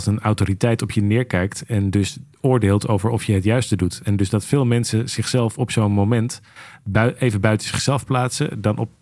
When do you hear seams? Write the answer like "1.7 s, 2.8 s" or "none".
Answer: none